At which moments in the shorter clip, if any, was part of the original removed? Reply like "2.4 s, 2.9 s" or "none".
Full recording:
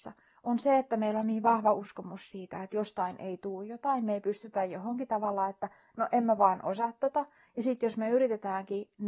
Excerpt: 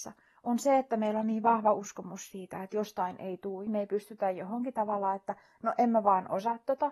3.7 s